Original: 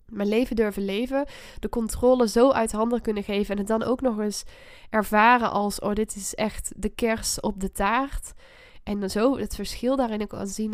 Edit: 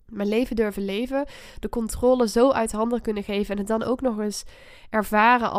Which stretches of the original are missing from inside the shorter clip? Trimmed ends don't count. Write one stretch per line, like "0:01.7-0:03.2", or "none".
none